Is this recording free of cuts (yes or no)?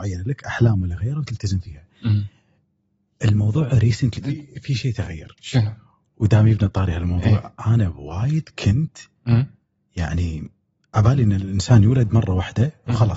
no